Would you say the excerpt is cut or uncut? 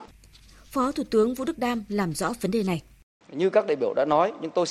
cut